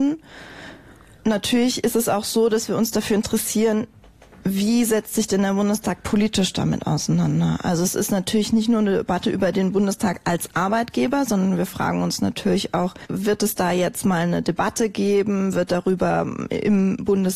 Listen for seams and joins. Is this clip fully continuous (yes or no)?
yes